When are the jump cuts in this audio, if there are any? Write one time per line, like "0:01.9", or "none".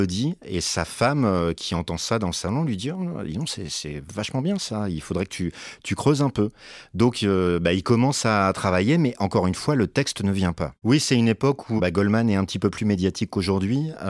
0:10.8
0:11.8

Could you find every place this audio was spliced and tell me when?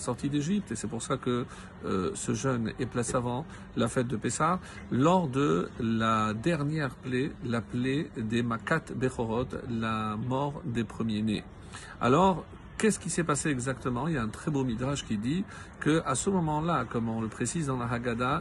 0:03.1

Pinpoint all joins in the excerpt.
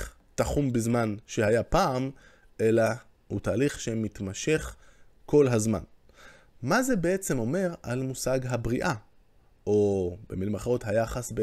0:06.5

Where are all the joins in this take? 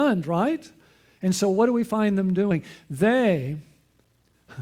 none

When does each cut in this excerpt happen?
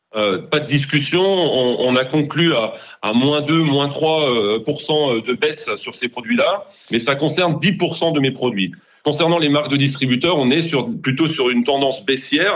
0:06.9

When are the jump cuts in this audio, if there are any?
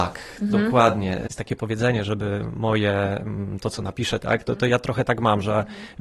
0:02.1
0:04.2

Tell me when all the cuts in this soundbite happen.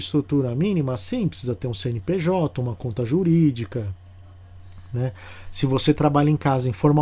none

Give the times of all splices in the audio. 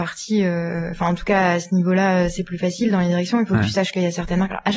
none

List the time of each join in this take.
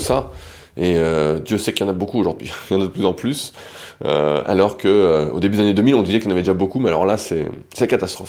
none

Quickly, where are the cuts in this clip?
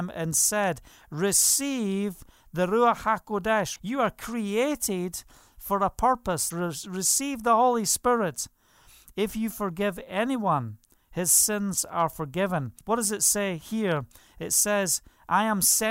0:03.8
0:06.5
0:12.8

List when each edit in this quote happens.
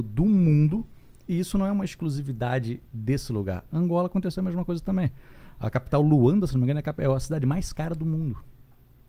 none

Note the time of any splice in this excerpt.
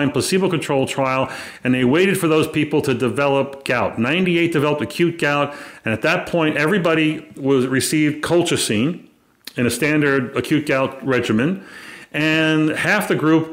none

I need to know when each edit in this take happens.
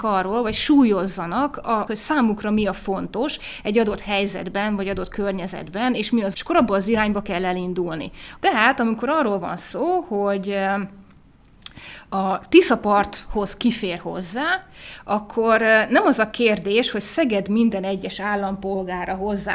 0:01.9
0:06.3
0:08.4

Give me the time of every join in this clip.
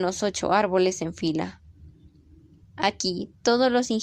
0:02.6

